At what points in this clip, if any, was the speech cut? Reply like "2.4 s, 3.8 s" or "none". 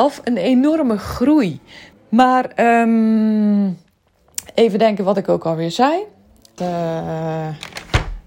1.9 s, 6.6 s